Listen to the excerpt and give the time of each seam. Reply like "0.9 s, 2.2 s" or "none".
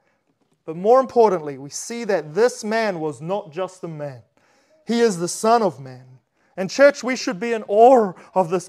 none